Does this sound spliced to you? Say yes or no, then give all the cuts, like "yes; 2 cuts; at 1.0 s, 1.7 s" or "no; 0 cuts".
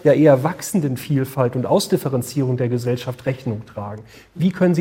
no; 0 cuts